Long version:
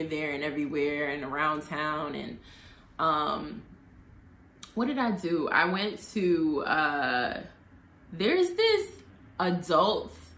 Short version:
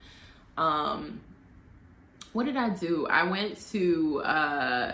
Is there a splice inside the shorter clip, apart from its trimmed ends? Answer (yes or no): no